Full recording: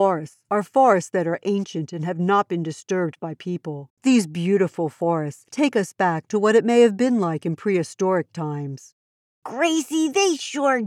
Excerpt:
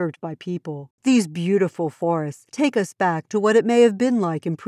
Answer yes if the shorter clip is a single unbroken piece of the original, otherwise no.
yes